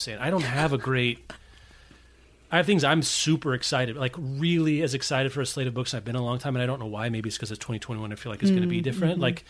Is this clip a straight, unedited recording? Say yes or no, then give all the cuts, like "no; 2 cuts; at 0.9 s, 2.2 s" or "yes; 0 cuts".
yes; 0 cuts